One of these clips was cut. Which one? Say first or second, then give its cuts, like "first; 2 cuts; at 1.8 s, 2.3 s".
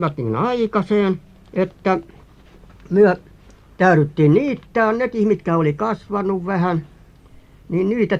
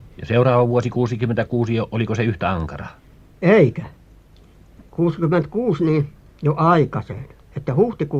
second; 1 cut; at 6.2 s